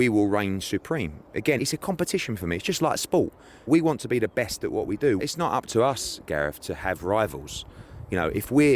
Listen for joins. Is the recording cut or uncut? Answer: cut